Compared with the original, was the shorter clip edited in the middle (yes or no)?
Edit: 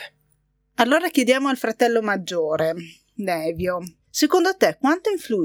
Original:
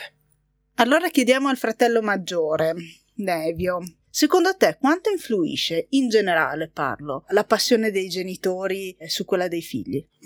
no